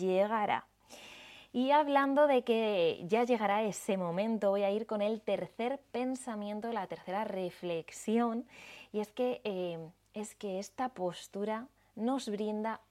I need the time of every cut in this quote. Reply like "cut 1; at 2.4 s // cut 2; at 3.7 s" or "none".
none